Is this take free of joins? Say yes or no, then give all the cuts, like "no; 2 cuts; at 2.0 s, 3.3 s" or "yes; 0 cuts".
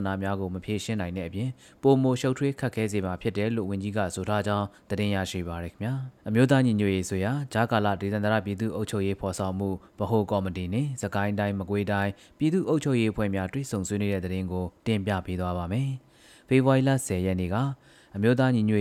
no; 1 cut; at 6.2 s